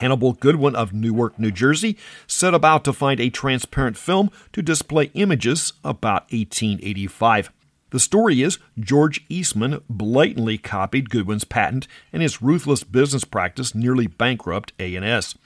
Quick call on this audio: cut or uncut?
cut